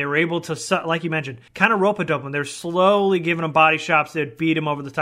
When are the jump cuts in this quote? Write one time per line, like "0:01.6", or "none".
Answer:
0:01.5